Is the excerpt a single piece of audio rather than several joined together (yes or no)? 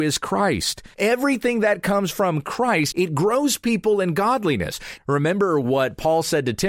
no